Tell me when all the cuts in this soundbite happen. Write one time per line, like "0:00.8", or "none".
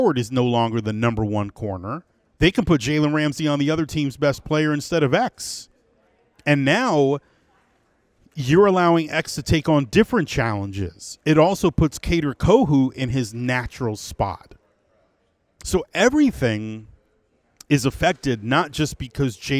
0:02.3